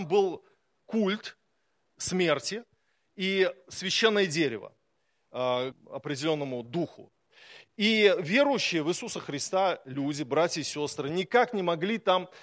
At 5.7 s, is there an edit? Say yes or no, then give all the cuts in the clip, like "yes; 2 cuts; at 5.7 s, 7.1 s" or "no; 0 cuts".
yes; 1 cut; at 5.7 s